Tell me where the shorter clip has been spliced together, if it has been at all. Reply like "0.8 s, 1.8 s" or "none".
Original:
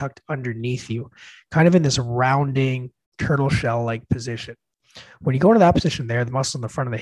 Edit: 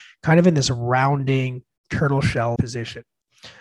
2.6 s